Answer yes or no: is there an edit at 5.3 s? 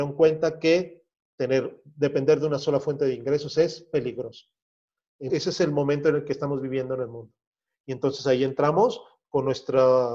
yes